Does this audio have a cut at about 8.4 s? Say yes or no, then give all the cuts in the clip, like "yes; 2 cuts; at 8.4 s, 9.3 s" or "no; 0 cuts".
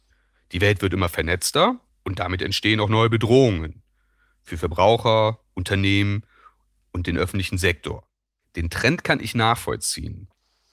yes; 1 cut; at 8.4 s